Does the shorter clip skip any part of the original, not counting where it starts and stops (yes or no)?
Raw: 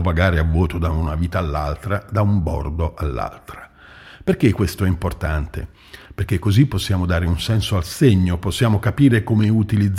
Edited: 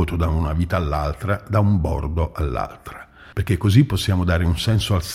yes